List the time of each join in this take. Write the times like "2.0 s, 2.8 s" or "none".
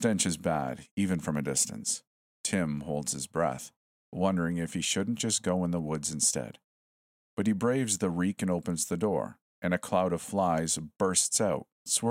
none